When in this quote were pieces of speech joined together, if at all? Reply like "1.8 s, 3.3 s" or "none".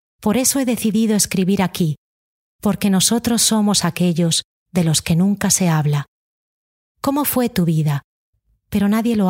6.9 s